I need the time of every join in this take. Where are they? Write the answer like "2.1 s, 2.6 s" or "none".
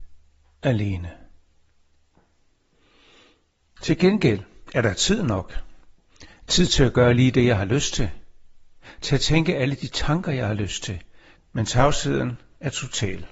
11.4 s